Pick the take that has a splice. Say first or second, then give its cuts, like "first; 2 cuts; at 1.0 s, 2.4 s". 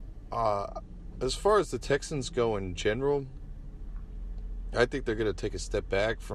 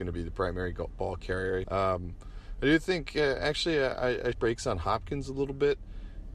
second; 2 cuts; at 1.6 s, 4.3 s